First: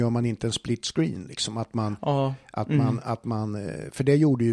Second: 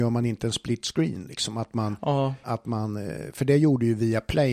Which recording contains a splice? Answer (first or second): second